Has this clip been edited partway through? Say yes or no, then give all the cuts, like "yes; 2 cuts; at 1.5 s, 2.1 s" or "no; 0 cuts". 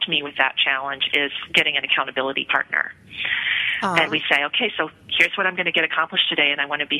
yes; 1 cut; at 4.0 s